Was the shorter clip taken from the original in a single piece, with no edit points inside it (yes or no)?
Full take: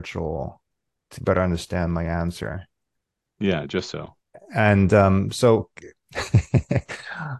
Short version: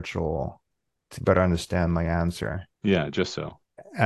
no